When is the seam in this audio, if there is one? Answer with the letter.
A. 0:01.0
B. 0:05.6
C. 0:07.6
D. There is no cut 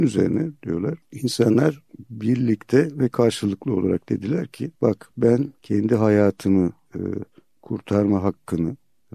B